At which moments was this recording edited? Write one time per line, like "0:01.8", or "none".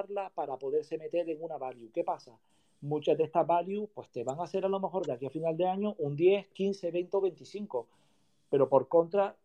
none